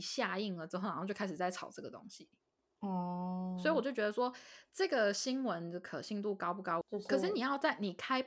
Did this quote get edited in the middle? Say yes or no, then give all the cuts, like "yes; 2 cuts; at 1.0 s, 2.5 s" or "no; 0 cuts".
yes; 1 cut; at 6.8 s